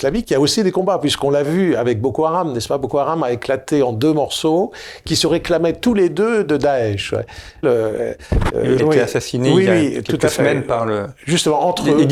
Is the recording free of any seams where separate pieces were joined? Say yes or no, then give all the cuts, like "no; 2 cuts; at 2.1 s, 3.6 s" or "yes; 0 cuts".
no; 2 cuts; at 7.6 s, 8.8 s